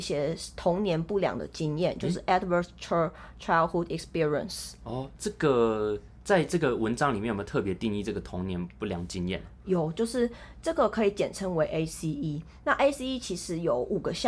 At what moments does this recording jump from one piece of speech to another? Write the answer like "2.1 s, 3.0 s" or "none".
5.2 s